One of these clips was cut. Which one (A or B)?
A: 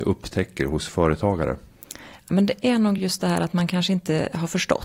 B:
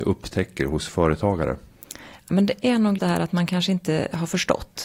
B